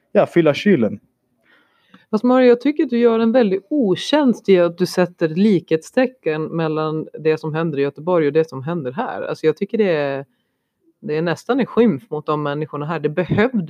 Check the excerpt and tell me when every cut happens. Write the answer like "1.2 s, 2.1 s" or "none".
none